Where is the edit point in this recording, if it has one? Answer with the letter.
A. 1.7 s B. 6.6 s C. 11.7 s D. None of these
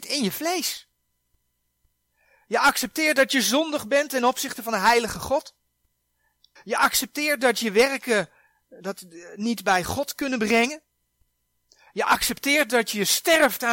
B